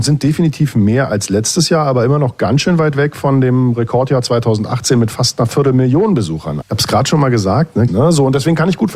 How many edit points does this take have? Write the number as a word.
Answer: two